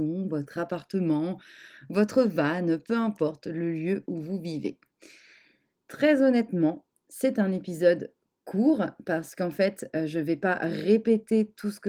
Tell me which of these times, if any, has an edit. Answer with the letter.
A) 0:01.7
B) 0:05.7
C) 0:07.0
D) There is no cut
B